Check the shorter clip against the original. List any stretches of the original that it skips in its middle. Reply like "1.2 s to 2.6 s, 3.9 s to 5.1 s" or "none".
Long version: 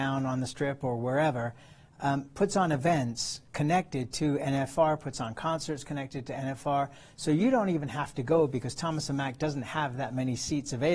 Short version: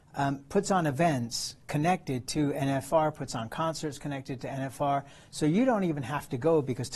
none